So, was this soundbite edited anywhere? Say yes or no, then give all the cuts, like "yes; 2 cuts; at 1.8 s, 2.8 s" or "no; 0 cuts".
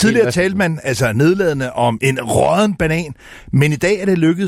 yes; 1 cut; at 2.0 s